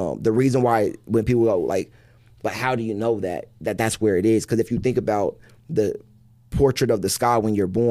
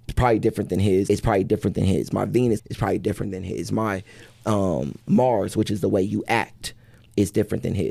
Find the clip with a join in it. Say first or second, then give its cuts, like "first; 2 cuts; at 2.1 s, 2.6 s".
second; 2 cuts; at 1.1 s, 2.6 s